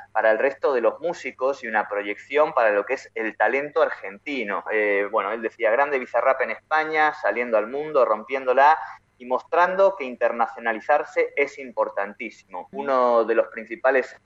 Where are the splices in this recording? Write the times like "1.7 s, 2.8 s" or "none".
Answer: 4.7 s, 12.7 s